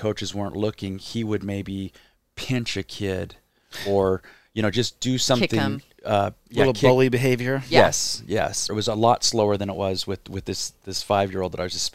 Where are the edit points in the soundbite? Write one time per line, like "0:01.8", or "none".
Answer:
0:08.7

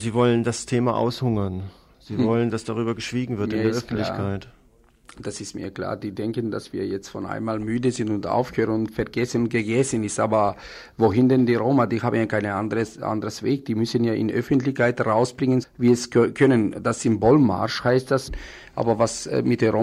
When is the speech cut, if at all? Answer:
0:15.6
0:18.3

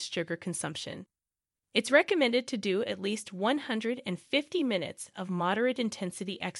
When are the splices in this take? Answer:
0:01.6

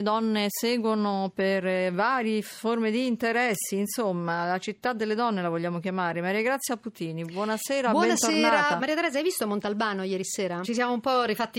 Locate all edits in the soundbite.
0:08.8
0:10.6

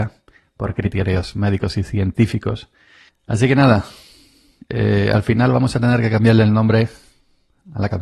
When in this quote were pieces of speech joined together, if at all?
0:03.1

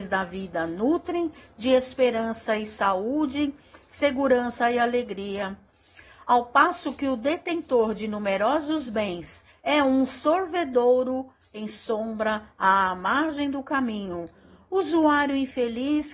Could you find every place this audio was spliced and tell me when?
0:09.5

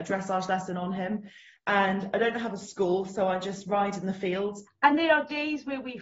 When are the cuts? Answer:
0:04.7

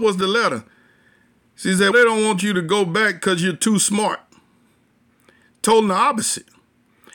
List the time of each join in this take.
0:01.9

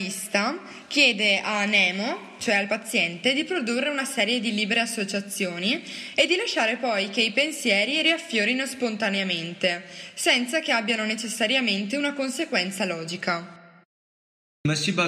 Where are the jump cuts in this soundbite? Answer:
0:02.7

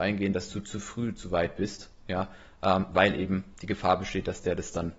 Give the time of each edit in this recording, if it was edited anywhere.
none

